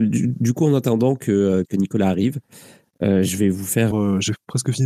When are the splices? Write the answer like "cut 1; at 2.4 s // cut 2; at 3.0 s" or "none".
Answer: cut 1; at 1.6 s // cut 2; at 3.9 s